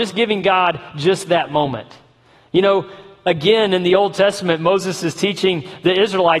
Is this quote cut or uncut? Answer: uncut